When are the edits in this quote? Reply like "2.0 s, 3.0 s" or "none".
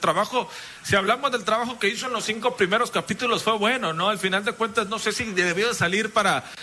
none